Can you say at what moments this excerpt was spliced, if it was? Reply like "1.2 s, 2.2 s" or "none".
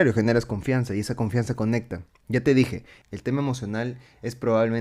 3.0 s